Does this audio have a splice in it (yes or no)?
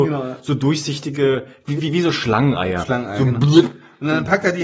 yes